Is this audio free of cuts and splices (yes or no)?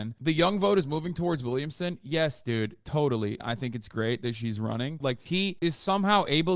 no